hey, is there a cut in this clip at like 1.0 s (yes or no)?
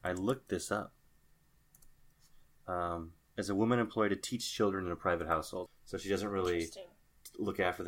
no